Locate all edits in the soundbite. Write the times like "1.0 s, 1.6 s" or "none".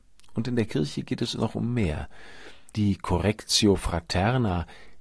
2.7 s